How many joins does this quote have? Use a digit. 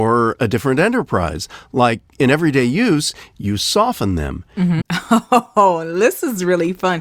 2